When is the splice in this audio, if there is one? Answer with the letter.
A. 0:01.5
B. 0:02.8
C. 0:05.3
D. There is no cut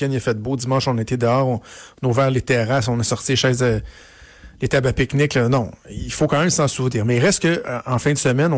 D